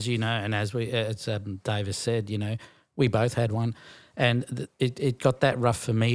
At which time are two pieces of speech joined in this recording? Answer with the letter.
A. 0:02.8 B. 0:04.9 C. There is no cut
C